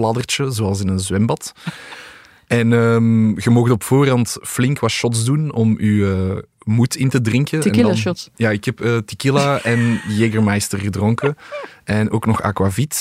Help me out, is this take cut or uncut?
uncut